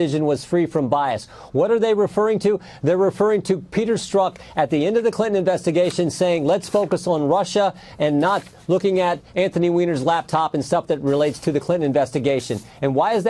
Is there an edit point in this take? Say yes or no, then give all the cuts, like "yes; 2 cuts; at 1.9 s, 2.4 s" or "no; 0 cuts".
no; 0 cuts